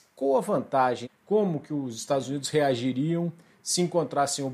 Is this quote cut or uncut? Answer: cut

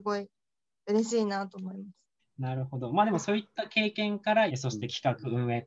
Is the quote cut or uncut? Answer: cut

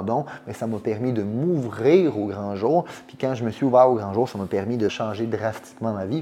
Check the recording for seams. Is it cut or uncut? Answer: cut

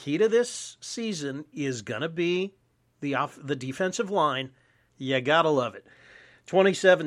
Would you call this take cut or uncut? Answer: cut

